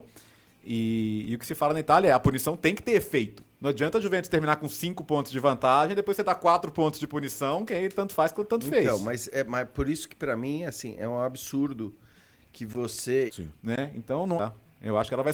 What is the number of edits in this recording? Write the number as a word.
two